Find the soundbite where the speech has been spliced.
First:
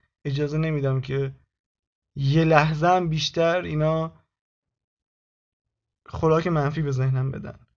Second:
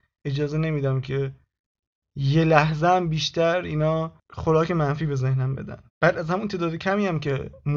second; 2 cuts; at 4.2 s, 5.9 s

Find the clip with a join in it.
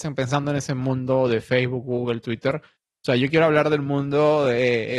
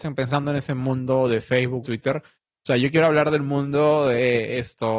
second; 1 cut; at 1.8 s

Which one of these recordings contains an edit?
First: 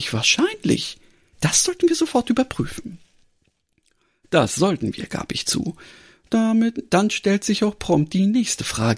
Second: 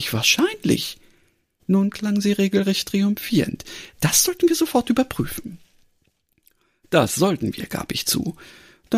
first; 1 cut; at 1.3 s

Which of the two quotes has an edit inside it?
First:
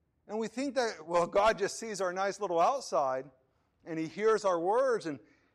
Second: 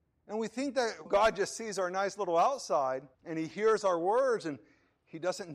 second; 2 cuts; at 1.1 s, 3.1 s

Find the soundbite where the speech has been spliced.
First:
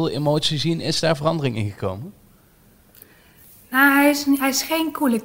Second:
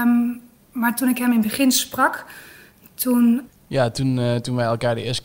second; 1 cut; at 3.5 s

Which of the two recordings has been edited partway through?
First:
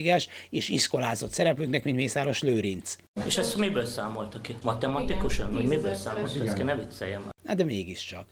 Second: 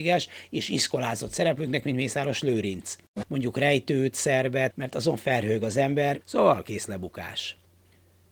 second; 3 cuts; at 3.2 s, 4.7 s, 6.2 s

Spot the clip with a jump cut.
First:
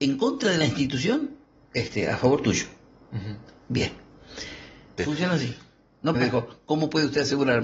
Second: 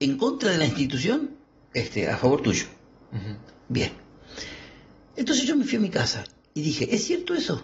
first; 2 cuts; at 5.0 s, 6.1 s

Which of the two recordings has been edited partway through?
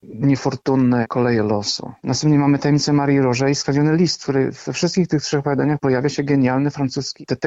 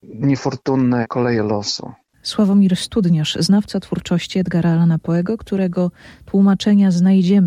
first; 1 cut; at 2.0 s

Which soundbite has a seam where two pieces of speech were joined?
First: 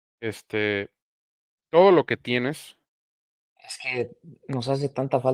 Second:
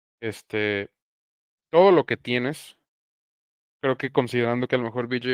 first; 1 cut; at 3.6 s

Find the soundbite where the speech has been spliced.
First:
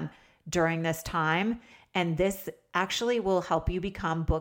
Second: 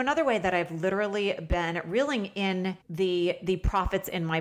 second; 1 cut; at 2.8 s

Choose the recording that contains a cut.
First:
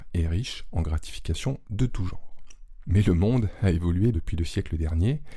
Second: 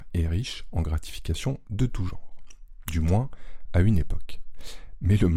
first; 2 cuts; at 2.8 s, 4.1 s

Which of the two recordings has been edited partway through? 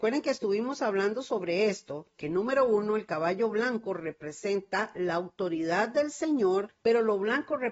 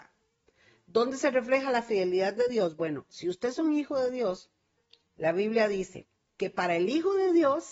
first; 1 cut; at 6.7 s

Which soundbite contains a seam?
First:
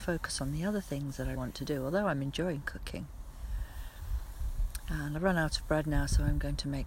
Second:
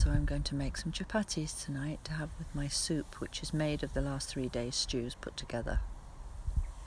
first; 1 cut; at 1.4 s

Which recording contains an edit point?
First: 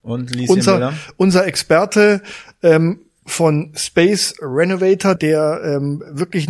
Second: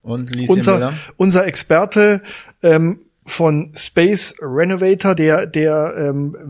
first; 1 cut; at 5.2 s

